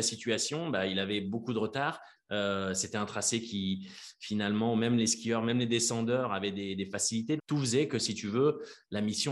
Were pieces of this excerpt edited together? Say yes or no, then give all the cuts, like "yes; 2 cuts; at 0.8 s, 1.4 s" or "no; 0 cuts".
yes; 2 cuts; at 2.2 s, 7.4 s